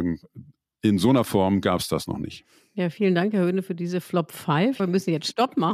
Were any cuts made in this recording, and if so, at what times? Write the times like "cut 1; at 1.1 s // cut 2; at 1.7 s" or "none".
cut 1; at 4.8 s